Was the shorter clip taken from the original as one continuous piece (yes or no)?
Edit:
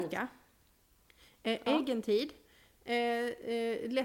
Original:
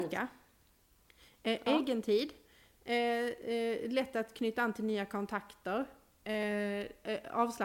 yes